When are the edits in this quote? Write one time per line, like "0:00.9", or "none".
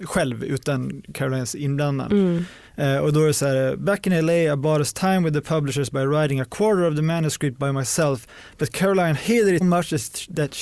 0:09.6